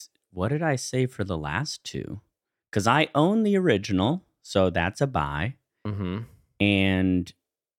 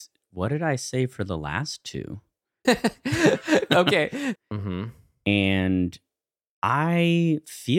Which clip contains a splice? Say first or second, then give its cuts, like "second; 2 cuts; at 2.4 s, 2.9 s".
second; 2 cuts; at 2.6 s, 4.3 s